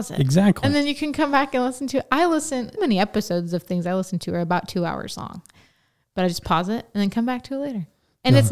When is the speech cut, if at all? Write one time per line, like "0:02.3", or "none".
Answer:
0:02.8